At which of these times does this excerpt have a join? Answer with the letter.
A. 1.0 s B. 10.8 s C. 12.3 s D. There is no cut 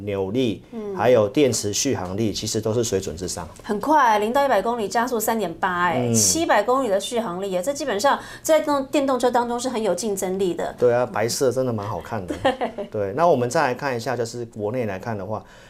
B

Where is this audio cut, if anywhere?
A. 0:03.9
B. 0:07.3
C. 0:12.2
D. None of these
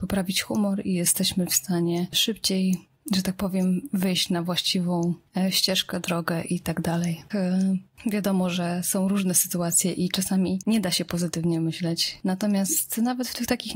B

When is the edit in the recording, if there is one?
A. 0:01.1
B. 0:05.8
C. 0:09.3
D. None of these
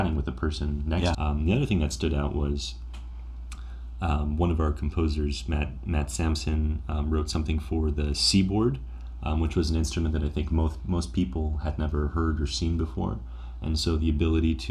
A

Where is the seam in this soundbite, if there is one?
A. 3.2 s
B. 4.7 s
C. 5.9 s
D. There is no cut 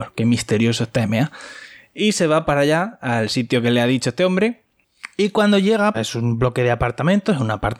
C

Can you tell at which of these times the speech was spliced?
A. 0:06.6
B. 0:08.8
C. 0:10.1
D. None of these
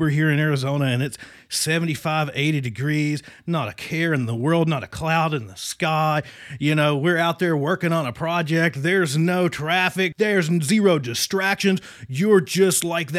C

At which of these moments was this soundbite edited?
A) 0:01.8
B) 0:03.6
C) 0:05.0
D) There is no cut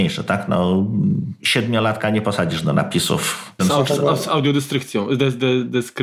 B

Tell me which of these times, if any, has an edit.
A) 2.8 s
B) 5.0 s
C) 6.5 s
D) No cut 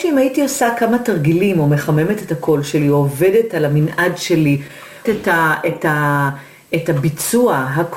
B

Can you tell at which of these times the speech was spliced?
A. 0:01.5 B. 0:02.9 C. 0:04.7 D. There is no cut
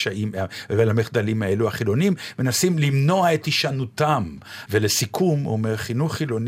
C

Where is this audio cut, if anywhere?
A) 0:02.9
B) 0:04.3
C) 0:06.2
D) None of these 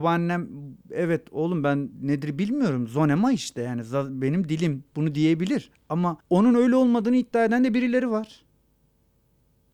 C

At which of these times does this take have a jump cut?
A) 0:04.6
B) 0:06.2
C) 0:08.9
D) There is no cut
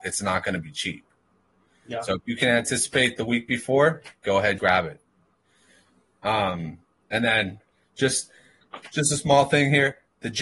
A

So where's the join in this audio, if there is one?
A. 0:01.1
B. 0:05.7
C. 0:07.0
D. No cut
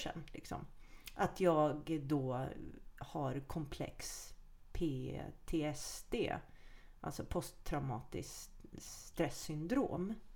D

